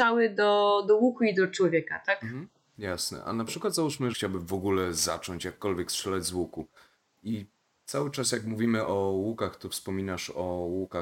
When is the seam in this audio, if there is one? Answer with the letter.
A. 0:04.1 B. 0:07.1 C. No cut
A